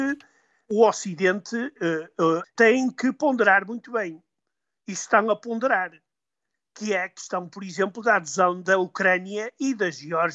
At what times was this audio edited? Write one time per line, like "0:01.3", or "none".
0:02.4